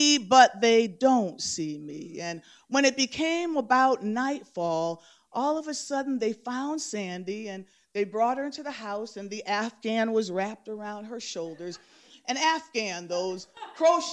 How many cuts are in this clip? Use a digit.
0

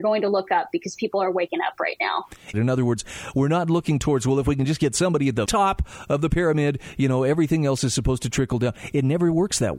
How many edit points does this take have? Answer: 2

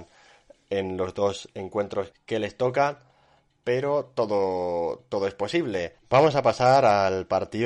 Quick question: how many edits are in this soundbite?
2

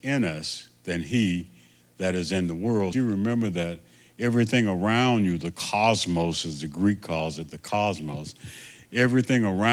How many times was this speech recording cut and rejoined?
1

